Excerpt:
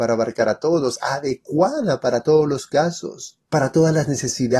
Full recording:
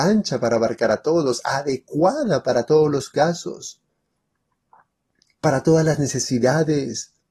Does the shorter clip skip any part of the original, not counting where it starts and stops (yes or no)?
yes